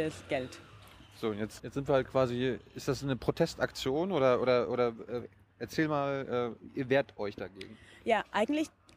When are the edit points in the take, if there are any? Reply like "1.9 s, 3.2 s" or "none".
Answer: 1.6 s